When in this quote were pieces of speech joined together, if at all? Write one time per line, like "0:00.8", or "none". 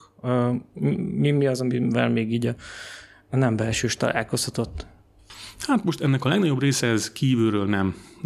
none